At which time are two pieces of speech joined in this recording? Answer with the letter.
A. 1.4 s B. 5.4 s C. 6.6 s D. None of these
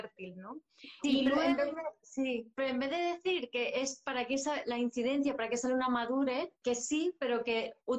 C